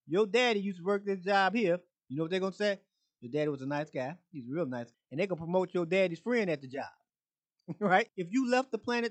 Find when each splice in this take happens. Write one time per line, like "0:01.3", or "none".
0:01.9
0:04.9
0:08.1